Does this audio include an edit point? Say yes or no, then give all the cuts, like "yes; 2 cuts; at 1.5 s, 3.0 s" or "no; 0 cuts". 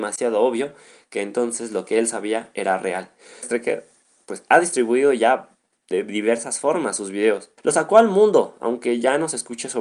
yes; 2 cuts; at 3.4 s, 7.6 s